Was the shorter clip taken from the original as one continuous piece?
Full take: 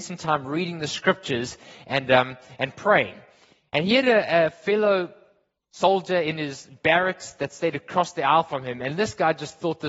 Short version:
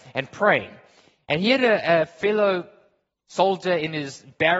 yes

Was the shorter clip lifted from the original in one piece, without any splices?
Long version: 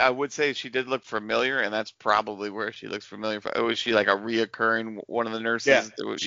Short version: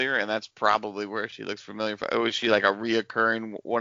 yes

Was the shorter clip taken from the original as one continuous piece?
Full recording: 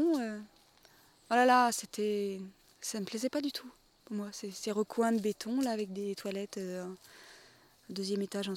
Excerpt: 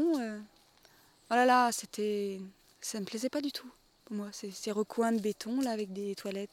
yes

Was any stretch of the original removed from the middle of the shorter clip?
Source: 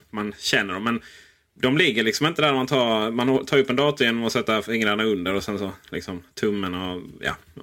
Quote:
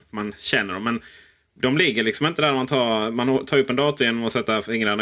no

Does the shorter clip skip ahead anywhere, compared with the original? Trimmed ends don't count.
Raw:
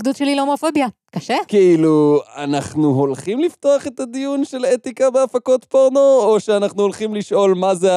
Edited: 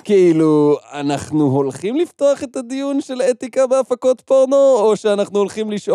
no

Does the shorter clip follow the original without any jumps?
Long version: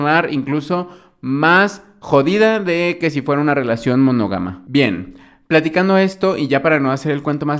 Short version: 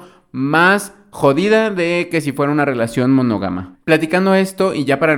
no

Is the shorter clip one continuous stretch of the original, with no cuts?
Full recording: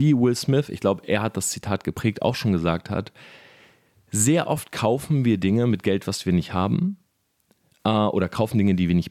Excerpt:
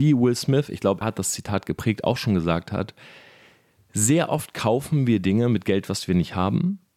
no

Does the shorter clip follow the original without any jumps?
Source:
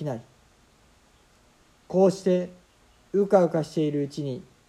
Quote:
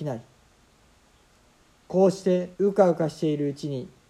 no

